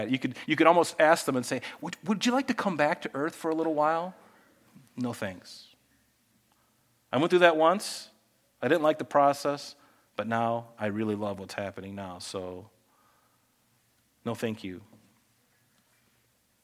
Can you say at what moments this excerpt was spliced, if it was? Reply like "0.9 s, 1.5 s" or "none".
none